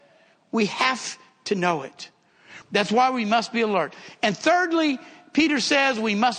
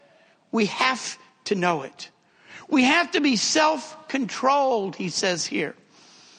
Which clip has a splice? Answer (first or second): first